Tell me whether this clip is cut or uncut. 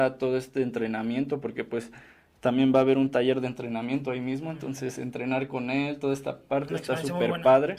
uncut